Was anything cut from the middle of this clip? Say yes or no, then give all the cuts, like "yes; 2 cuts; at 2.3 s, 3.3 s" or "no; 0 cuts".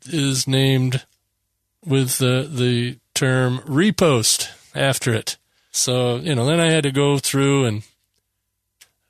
yes; 1 cut; at 5.7 s